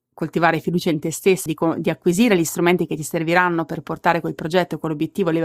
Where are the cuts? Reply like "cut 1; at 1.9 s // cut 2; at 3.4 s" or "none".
cut 1; at 1.5 s